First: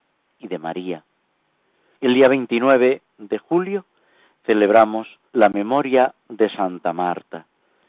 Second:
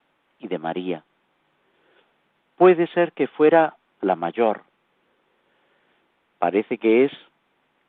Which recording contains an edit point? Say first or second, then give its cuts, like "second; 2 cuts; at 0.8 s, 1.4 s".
first; 2 cuts; at 1.9 s, 5.3 s